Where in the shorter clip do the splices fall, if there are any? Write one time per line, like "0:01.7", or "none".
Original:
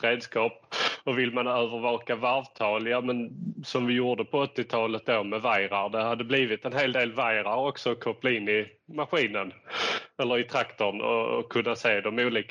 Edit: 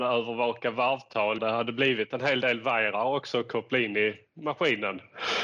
0:01.4

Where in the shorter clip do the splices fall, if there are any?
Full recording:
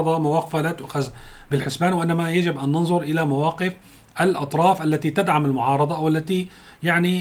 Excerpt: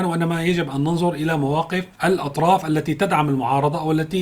0:01.9

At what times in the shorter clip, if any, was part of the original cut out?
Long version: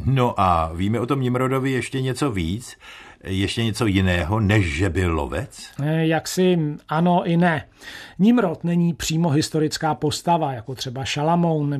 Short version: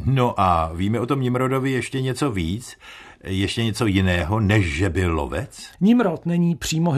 0:05.7

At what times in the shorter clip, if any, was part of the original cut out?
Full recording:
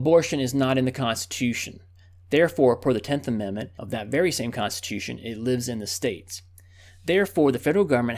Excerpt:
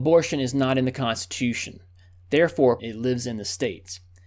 0:02.8

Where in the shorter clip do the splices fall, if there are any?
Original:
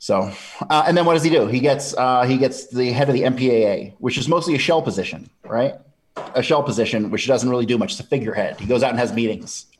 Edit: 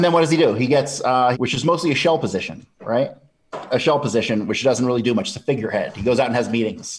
0:01.3

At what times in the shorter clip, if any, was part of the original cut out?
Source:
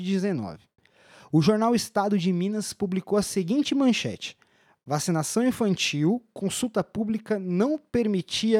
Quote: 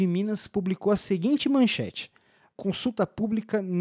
0:02.6

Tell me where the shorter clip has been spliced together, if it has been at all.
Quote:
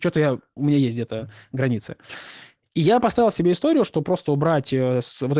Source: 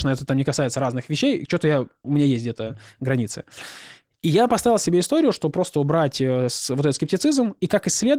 none

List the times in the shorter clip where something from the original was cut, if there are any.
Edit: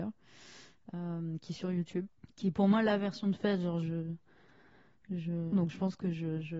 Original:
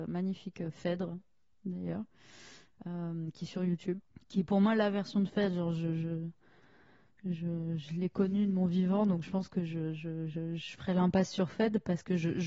0:03.8
0:05.5

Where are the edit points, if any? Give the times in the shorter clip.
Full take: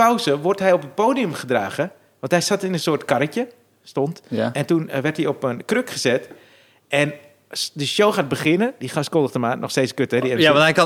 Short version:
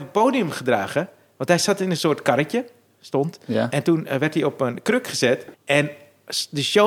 0:05.5

